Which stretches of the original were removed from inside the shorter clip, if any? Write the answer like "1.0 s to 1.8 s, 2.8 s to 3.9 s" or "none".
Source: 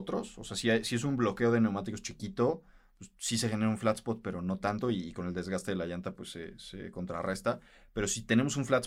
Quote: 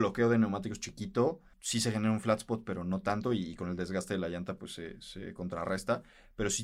2.8 s to 3.1 s